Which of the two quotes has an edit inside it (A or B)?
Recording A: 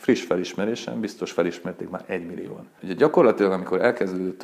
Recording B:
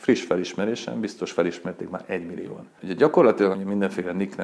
B